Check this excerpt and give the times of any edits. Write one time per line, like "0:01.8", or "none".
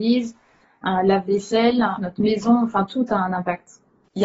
0:02.0